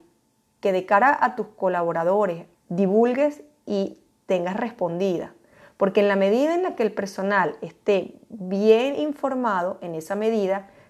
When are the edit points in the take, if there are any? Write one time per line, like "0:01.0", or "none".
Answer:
0:02.5

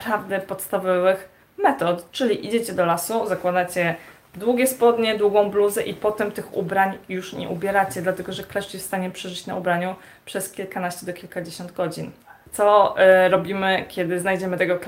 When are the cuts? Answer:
none

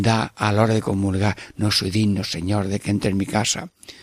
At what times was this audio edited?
none

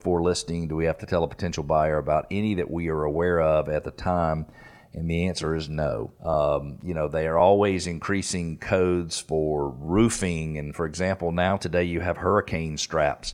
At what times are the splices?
0:06.2

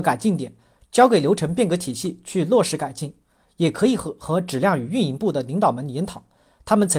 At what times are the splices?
0:03.4

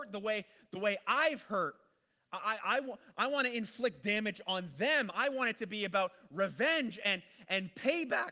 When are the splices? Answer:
none

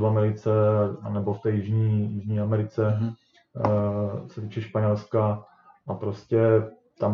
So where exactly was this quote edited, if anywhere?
none

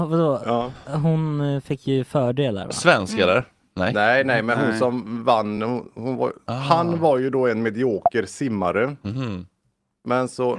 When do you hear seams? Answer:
none

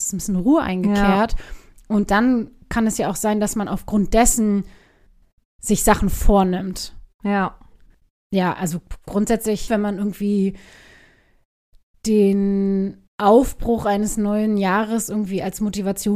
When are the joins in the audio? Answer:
0:09.7
0:13.1

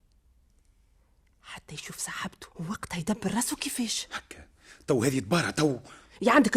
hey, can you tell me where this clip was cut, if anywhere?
0:02.5

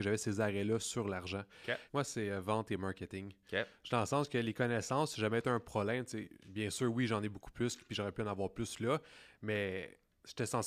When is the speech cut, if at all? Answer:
0:01.9

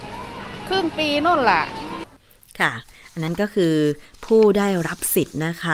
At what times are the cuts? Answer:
none

